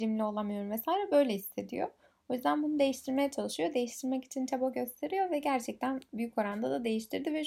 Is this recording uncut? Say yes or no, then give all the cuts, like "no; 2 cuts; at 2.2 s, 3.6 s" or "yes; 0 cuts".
yes; 0 cuts